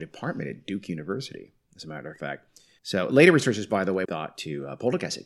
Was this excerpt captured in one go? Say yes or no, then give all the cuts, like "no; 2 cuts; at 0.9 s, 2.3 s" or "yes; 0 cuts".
no; 2 cuts; at 2.8 s, 4.1 s